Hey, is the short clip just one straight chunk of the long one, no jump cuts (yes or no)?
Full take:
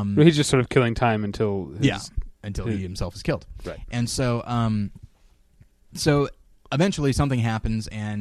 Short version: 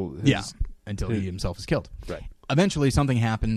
no